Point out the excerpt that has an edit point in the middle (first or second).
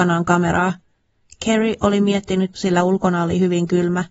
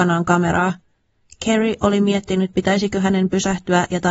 first